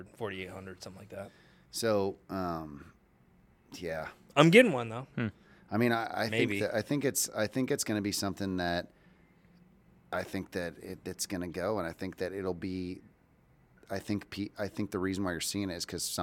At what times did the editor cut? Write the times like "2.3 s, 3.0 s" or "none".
none